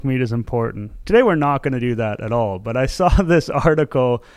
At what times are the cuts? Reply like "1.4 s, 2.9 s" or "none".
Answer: 1.0 s